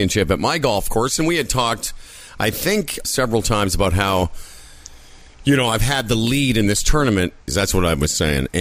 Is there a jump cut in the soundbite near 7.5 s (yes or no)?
yes